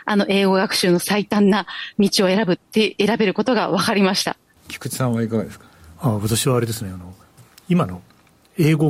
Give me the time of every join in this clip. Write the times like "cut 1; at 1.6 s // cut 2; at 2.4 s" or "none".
cut 1; at 4.6 s